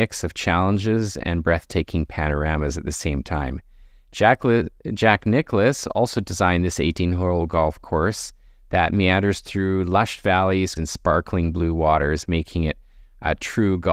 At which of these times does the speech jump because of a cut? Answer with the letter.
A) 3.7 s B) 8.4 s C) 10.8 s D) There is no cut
C